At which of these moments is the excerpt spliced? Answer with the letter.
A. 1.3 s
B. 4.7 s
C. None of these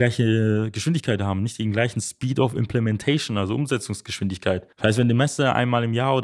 B